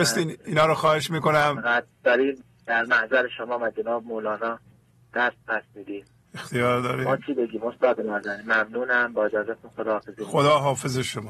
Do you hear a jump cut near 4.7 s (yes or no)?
no